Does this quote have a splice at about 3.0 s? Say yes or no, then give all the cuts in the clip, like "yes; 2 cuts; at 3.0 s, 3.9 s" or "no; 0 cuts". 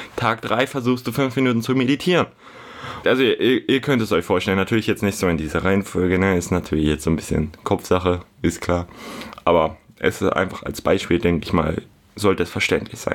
yes; 1 cut; at 3.0 s